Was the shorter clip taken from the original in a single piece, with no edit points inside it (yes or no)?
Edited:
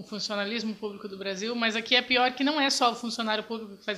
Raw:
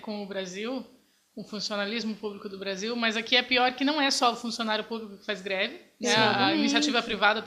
yes